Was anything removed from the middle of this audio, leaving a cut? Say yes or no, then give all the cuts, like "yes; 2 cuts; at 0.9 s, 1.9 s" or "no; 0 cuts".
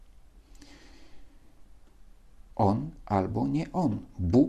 yes; 1 cut; at 2.5 s